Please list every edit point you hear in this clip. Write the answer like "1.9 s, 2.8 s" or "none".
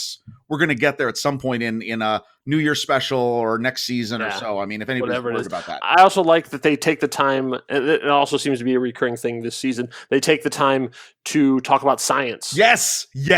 none